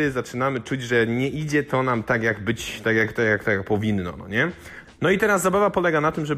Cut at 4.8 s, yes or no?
yes